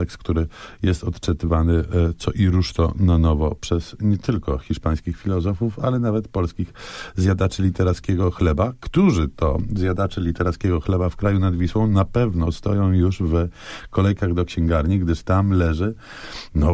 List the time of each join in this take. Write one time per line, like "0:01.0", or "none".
none